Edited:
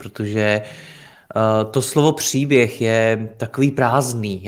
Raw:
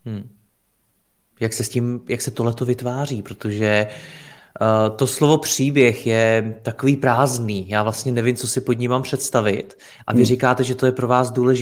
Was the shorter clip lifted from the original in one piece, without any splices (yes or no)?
yes